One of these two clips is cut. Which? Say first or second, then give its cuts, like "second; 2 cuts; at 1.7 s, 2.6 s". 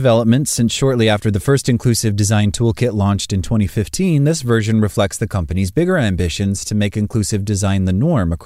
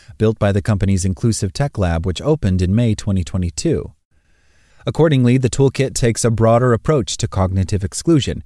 second; 1 cut; at 4.7 s